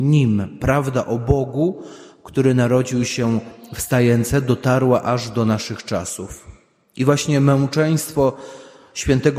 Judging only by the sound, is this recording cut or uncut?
uncut